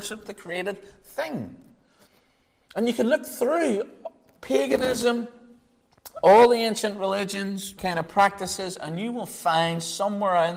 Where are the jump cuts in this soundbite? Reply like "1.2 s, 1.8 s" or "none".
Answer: 7.8 s